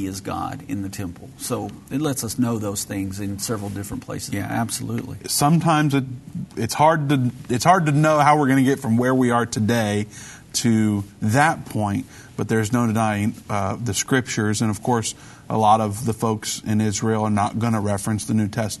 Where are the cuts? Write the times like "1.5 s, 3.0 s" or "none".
4.3 s